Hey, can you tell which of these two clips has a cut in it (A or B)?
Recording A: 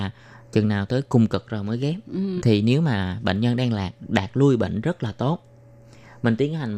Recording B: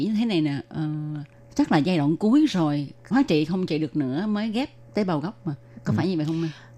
A